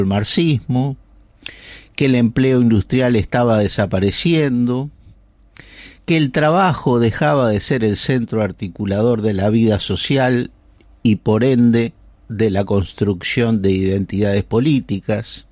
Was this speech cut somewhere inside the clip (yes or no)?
no